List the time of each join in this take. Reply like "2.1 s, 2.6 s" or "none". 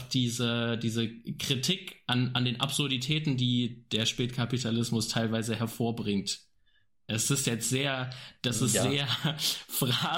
none